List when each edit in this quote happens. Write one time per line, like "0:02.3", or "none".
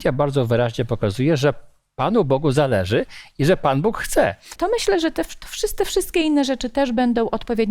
0:04.6